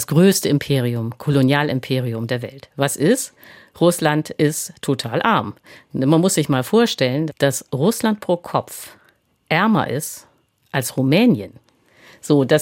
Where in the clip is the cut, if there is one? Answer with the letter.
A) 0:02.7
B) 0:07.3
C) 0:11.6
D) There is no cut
B